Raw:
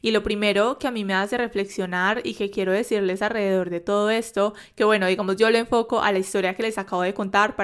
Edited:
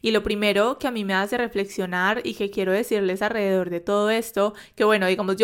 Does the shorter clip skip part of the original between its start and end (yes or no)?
no